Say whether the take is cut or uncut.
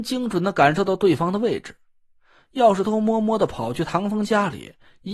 cut